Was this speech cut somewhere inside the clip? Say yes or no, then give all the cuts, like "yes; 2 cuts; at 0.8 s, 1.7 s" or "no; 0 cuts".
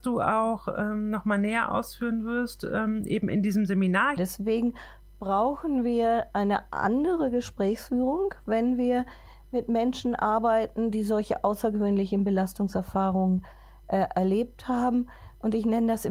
yes; 1 cut; at 4.2 s